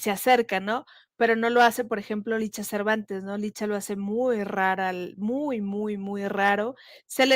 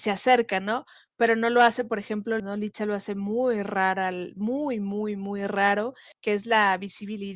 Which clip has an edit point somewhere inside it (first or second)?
second